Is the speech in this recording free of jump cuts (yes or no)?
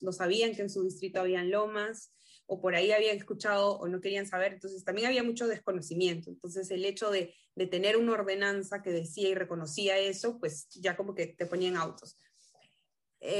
yes